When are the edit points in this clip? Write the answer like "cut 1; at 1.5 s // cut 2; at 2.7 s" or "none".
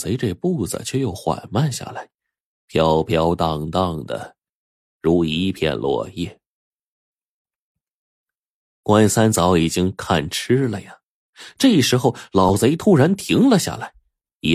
none

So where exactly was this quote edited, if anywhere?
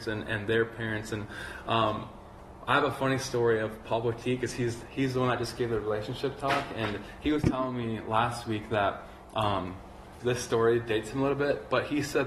cut 1; at 10.2 s

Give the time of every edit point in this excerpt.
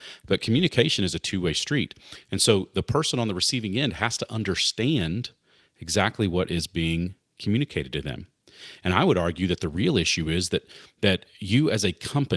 none

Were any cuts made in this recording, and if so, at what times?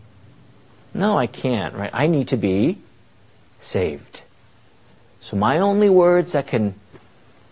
none

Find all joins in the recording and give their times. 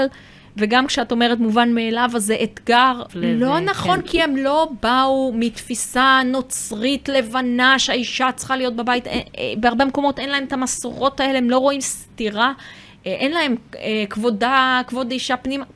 cut 1; at 3.1 s

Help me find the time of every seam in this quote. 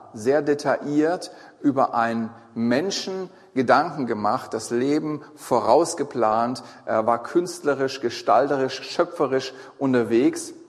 none

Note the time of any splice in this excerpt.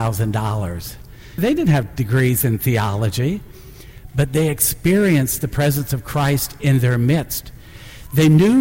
cut 1; at 1.4 s

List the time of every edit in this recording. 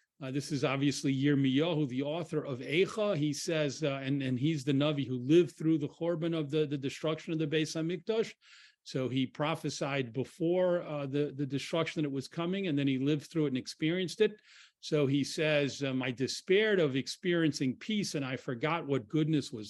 cut 1; at 16.0 s

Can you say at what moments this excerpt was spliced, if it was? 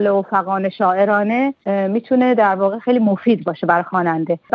cut 1; at 1.6 s

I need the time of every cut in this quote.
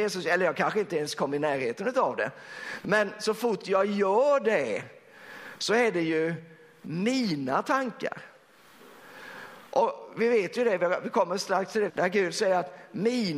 cut 1; at 9.7 s // cut 2; at 11.9 s

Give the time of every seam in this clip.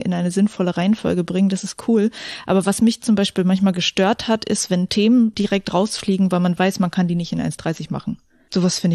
none

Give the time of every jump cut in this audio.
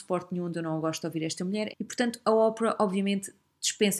cut 1; at 1.7 s

